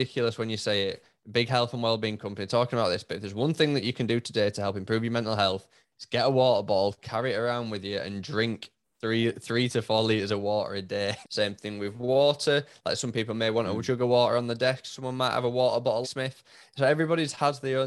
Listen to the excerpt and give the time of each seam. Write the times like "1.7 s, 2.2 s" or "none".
11.2 s, 16.0 s